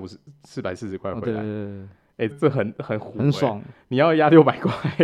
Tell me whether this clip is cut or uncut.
cut